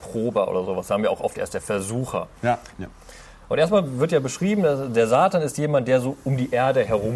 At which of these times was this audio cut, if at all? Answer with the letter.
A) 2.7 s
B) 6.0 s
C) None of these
A